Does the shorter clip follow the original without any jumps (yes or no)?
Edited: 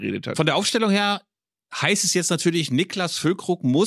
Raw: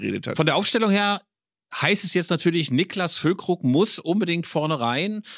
yes